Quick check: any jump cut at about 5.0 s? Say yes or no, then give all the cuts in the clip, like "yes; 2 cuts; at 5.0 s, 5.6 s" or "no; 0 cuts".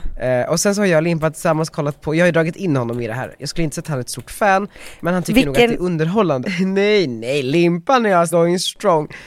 no; 2 cuts; at 6.4 s, 8.3 s